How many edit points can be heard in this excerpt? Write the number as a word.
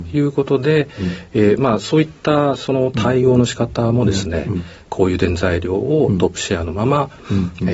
zero